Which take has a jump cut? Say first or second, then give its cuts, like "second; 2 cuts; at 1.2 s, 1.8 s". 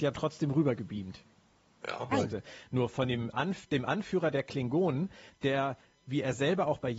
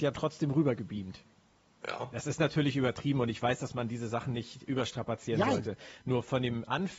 first; 1 cut; at 2.1 s